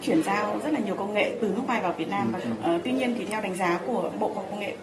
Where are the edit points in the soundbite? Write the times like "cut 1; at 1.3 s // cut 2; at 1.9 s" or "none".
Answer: cut 1; at 2.4 s